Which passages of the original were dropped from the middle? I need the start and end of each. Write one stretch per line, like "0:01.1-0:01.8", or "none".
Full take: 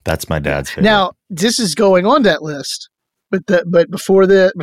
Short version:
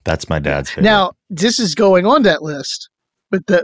none